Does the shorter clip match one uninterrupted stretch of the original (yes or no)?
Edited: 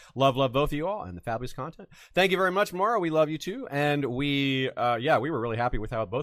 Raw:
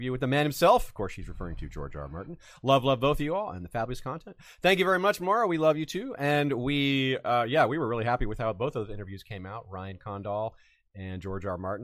yes